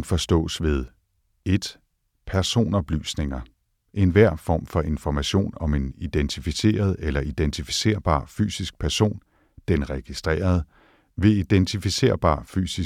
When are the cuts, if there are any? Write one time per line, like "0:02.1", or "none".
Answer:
none